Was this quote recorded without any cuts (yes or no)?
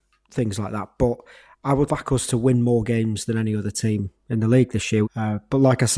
no